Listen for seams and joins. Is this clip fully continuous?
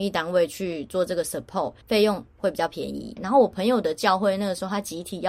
no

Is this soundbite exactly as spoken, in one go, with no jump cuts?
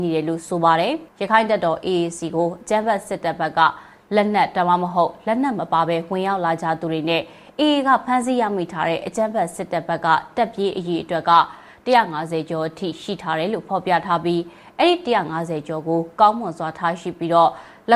yes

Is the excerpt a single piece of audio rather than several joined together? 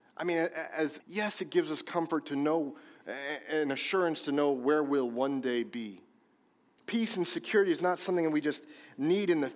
no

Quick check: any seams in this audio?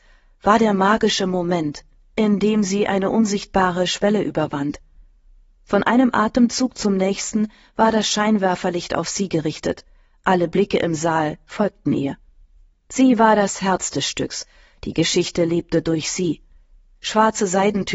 no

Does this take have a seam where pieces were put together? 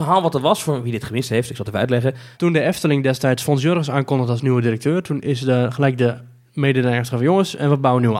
yes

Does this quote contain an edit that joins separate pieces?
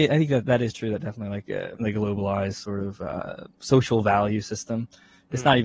yes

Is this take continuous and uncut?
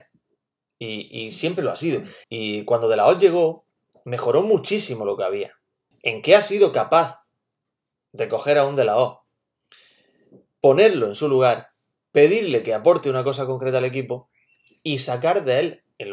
no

